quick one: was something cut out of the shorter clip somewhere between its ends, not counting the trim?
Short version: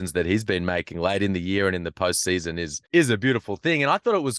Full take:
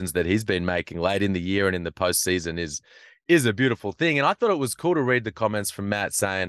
yes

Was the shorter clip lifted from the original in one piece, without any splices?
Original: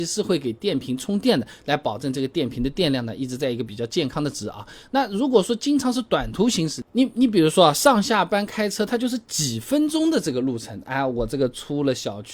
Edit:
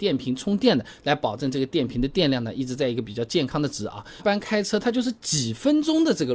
no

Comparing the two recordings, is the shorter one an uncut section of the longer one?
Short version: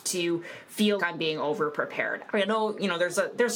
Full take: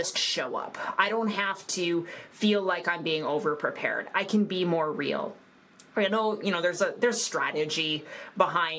no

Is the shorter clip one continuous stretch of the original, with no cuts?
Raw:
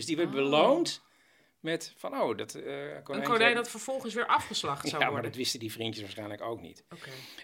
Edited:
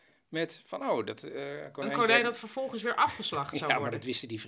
yes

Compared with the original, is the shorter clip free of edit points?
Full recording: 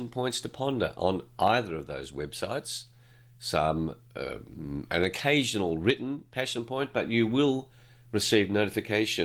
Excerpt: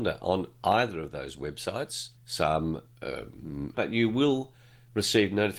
no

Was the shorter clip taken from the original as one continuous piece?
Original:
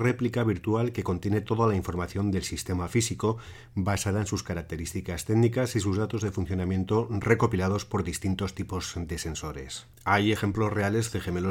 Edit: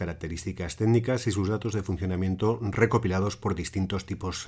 yes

